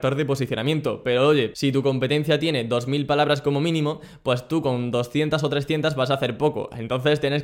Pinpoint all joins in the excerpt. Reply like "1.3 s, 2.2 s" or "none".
none